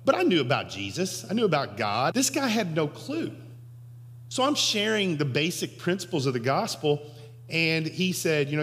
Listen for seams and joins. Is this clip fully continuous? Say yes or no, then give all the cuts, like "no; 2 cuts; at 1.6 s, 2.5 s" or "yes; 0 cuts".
no; 1 cut; at 2.1 s